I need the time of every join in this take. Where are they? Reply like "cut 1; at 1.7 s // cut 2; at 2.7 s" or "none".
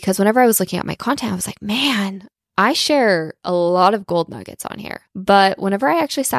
cut 1; at 5.1 s

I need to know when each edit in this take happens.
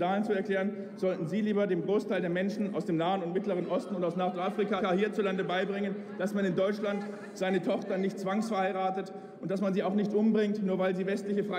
none

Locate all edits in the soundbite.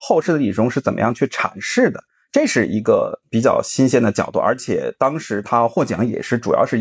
none

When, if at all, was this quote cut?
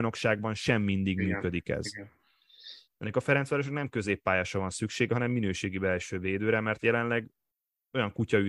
cut 1; at 2.8 s

